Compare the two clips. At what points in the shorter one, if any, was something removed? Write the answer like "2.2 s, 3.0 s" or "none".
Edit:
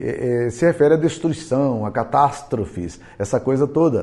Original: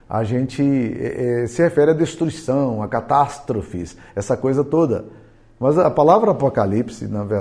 none